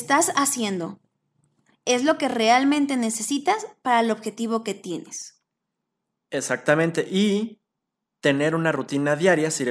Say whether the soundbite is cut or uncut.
uncut